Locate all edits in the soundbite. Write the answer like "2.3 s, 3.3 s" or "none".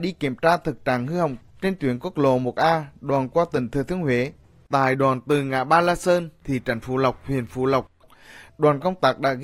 6.4 s